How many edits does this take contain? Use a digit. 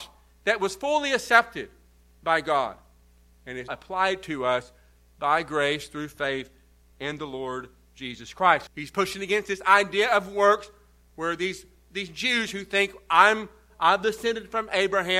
3